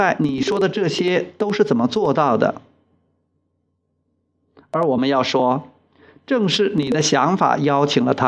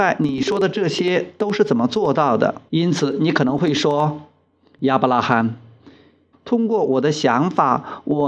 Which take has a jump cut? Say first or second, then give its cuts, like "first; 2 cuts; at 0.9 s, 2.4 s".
second; 2 cuts; at 2.7 s, 6.3 s